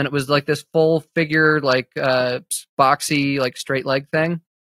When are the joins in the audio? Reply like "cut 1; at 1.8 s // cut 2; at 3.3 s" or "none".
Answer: none